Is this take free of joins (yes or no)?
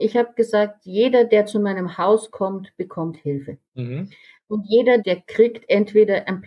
no